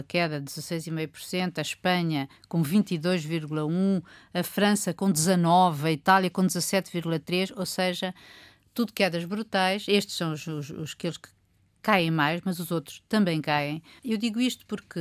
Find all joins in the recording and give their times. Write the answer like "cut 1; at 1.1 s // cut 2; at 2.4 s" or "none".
cut 1; at 14.0 s